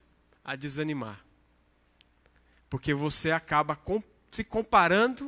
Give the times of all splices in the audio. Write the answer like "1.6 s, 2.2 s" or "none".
none